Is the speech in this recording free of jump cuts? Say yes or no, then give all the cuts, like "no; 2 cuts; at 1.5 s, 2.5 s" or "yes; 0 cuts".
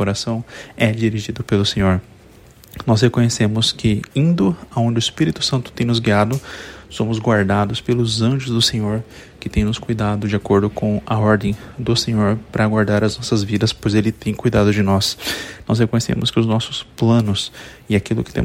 no; 1 cut; at 15.6 s